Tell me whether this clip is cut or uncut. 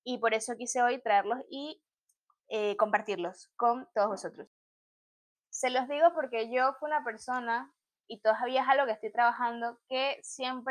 cut